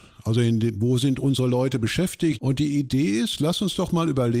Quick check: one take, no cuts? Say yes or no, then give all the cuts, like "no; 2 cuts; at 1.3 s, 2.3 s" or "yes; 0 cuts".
no; 1 cut; at 2.4 s